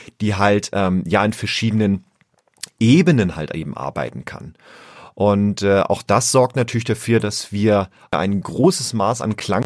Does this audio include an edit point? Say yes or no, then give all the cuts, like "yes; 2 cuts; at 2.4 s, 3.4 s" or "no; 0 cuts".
no; 0 cuts